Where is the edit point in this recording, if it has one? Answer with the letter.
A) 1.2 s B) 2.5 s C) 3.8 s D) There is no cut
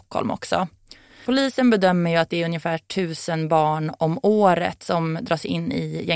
A